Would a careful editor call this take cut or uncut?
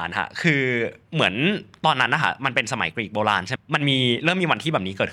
cut